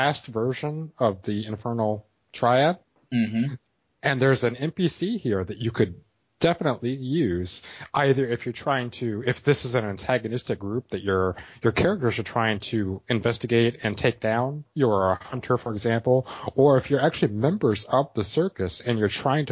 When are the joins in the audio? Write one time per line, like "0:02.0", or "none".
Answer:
none